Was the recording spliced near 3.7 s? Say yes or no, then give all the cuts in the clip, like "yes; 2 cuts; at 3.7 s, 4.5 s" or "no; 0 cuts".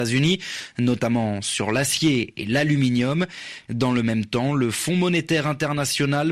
yes; 1 cut; at 3.7 s